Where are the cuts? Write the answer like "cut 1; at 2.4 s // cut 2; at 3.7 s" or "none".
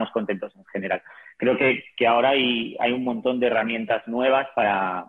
none